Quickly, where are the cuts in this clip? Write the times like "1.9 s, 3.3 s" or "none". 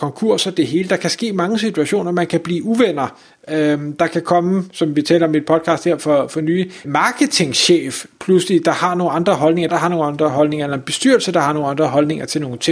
6.8 s, 9.7 s